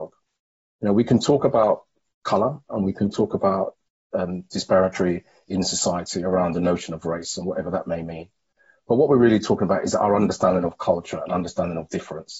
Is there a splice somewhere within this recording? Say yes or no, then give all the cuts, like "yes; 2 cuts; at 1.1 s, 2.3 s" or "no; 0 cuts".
no; 0 cuts